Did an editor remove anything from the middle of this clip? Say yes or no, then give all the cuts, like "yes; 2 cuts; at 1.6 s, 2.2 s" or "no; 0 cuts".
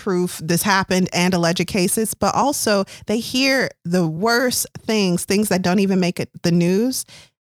no; 0 cuts